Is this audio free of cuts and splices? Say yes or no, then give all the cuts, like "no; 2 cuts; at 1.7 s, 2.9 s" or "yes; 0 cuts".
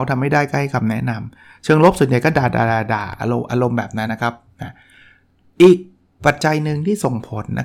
no; 1 cut; at 4.1 s